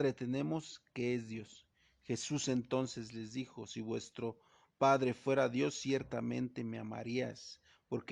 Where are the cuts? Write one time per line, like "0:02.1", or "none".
none